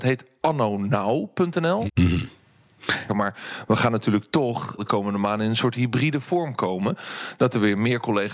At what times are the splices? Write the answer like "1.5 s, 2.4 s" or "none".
1.9 s, 3.1 s, 4.8 s